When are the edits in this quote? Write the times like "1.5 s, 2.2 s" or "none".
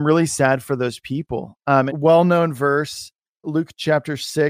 1.9 s, 3.4 s